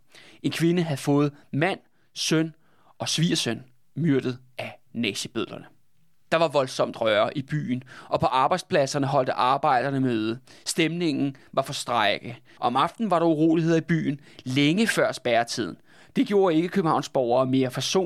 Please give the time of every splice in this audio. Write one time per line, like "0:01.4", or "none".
0:12.6
0:16.1